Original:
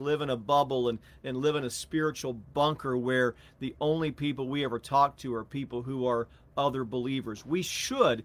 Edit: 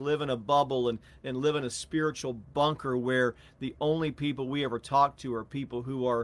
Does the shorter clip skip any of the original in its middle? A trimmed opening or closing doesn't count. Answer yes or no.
no